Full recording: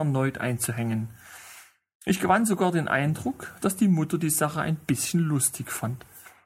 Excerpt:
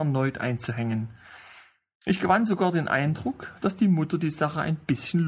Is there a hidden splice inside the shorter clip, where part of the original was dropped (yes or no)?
no